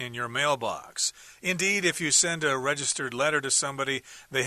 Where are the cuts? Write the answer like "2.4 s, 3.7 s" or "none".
none